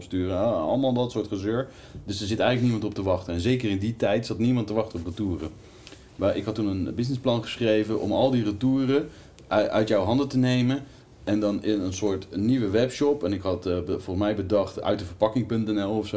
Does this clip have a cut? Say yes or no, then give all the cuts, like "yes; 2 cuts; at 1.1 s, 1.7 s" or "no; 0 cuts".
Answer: no; 0 cuts